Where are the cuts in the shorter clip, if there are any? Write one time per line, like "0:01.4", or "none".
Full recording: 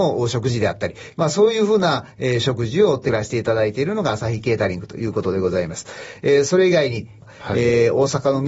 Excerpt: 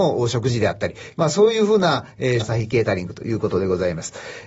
0:02.4